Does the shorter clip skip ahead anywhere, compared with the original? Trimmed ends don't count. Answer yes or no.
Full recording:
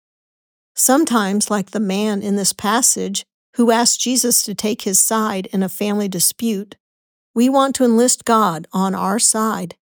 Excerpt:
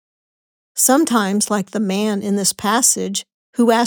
no